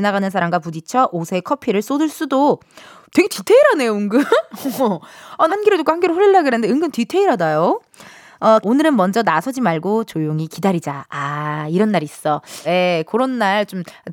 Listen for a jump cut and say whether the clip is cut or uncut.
cut